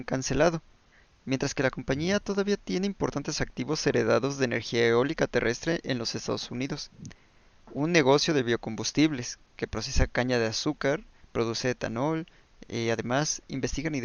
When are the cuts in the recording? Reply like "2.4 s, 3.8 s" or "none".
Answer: none